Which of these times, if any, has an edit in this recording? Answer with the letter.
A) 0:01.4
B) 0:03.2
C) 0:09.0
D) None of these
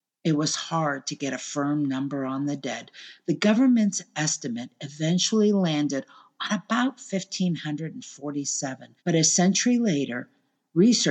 C